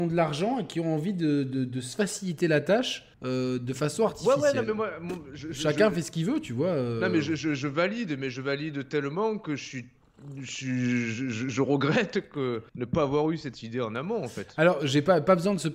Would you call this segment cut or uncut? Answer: cut